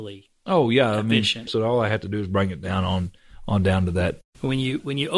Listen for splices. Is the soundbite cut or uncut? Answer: cut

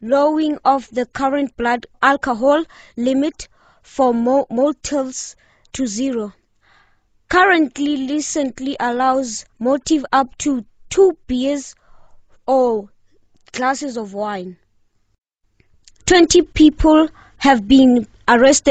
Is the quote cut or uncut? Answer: cut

